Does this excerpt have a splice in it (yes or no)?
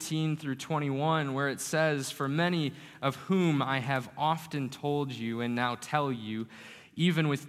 no